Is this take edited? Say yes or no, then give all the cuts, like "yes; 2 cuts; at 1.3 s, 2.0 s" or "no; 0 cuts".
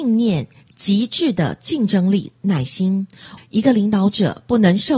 yes; 1 cut; at 3.4 s